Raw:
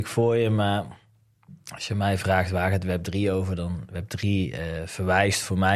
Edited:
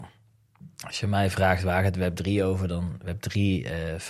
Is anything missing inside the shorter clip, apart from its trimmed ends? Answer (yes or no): no